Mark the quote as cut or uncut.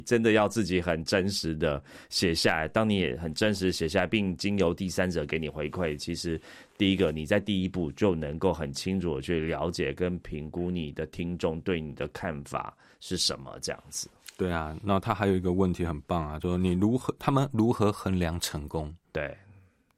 uncut